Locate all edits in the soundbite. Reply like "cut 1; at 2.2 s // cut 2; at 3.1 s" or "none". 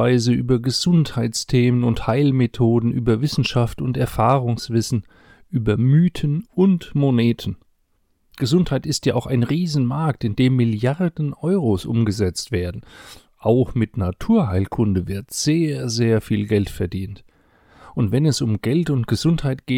cut 1; at 13.3 s